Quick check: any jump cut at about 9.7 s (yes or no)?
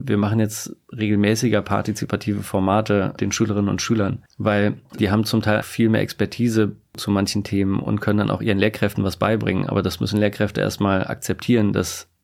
no